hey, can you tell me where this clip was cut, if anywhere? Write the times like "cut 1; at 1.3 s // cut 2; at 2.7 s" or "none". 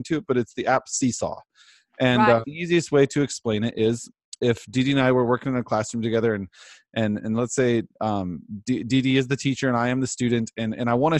cut 1; at 2.4 s

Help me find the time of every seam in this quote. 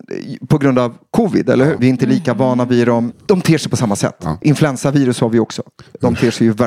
cut 1; at 1.8 s // cut 2; at 3.1 s // cut 3; at 4.4 s

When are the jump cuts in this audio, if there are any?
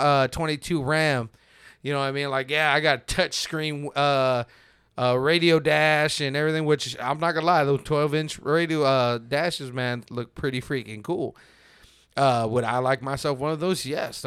none

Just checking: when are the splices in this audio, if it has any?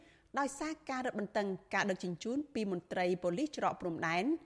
none

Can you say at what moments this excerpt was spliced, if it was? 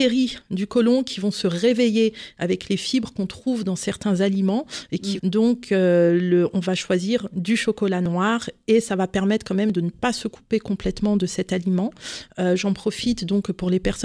cut 1; at 5.2 s

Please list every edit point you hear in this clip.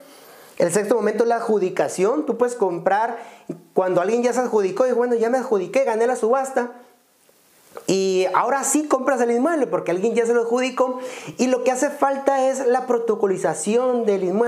none

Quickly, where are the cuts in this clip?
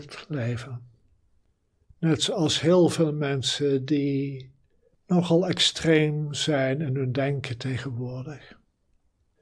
cut 1; at 1.8 s

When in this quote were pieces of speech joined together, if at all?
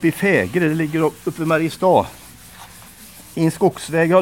none

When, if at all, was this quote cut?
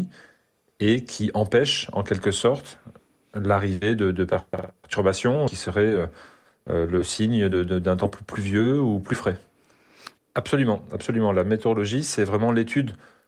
cut 1; at 10.2 s

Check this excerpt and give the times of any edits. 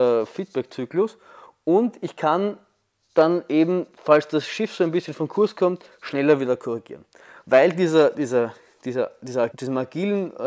cut 1; at 7.4 s // cut 2; at 9.5 s

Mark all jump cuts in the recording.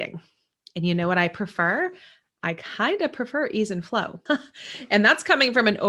cut 1; at 4.3 s

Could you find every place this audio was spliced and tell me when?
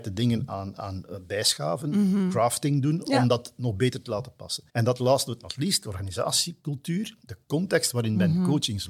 cut 1; at 4.7 s

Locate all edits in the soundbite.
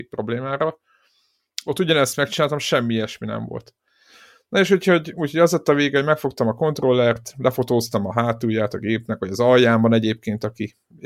none

